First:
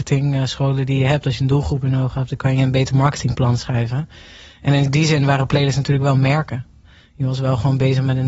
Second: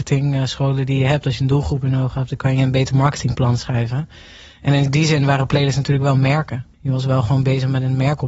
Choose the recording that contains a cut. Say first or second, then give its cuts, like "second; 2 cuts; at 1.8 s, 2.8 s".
second; 1 cut; at 6.7 s